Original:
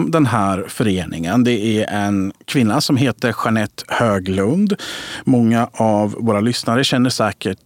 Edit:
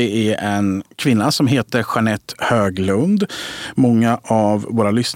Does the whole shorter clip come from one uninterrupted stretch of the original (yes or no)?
yes